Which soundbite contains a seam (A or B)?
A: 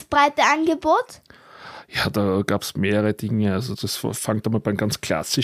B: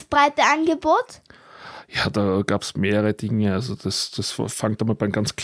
A